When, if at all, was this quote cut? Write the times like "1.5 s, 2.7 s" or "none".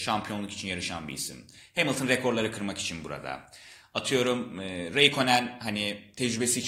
none